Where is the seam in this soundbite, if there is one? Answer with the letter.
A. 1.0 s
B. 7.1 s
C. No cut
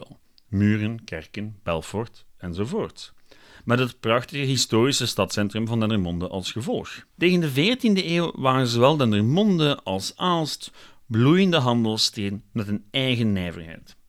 B